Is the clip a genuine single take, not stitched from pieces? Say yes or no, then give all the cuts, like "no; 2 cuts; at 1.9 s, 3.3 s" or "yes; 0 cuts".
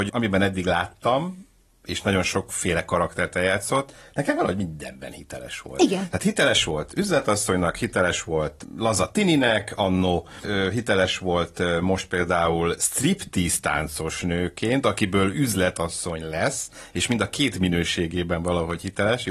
yes; 0 cuts